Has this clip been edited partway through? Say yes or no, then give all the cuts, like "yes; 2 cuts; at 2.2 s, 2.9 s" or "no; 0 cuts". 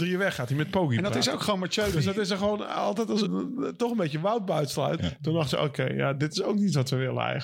yes; 2 cuts; at 3.2 s, 5.0 s